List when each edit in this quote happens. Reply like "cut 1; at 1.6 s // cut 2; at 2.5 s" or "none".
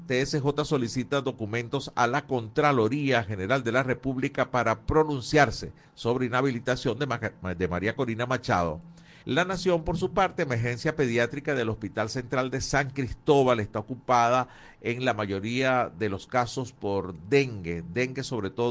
cut 1; at 9.2 s